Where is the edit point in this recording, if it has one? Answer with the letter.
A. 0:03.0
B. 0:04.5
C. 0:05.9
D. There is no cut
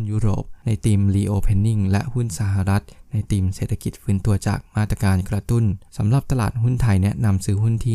C